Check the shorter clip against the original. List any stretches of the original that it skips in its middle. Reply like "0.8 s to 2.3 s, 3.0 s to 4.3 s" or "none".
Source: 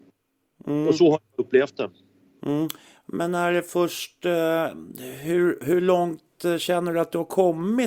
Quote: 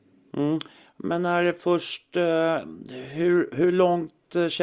none